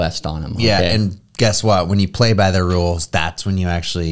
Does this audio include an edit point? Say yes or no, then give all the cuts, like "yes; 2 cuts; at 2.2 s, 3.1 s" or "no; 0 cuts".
no; 0 cuts